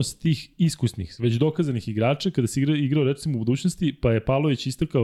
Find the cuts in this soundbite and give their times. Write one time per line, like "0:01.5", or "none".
0:01.2